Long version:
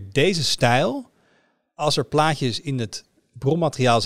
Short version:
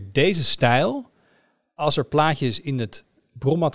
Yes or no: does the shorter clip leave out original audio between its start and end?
no